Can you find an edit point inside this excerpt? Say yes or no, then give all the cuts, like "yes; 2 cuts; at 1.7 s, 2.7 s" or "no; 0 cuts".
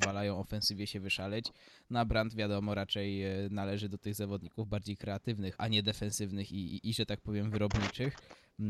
yes; 2 cuts; at 5.5 s, 6.8 s